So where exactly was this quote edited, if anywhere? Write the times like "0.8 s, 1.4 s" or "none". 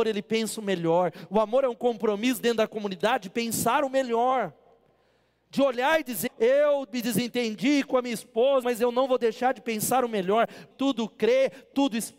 6.3 s, 8.6 s, 10.7 s